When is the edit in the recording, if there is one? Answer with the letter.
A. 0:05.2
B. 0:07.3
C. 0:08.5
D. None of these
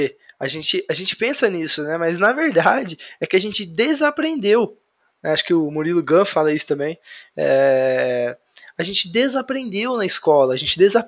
D